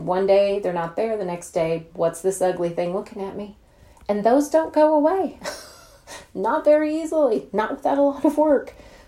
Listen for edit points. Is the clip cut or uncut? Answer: cut